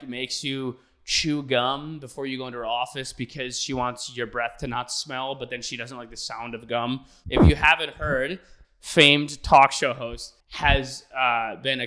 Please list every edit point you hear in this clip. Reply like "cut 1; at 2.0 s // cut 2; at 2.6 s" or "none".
cut 1; at 7.2 s // cut 2; at 8.6 s // cut 3; at 10.4 s